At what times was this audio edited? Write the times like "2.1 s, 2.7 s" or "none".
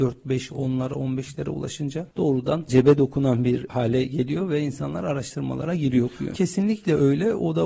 6.3 s